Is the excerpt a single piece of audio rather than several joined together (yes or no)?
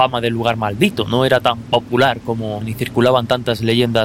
no